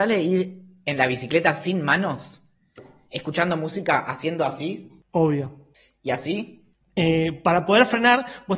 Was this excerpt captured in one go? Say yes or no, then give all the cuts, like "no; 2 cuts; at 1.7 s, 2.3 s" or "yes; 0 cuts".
no; 1 cut; at 6.8 s